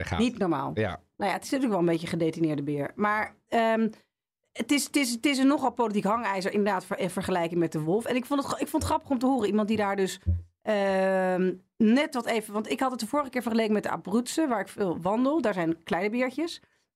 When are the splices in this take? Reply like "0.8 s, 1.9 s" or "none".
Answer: none